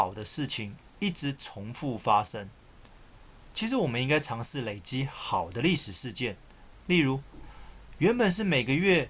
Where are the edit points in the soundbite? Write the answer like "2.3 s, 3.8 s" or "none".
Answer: 6.7 s